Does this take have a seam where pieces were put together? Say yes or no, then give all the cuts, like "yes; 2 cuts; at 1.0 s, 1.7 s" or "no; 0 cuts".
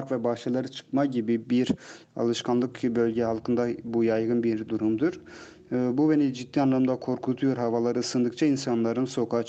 no; 0 cuts